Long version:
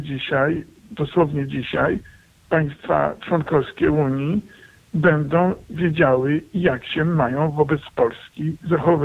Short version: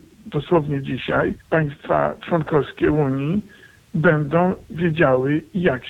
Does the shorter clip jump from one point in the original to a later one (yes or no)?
yes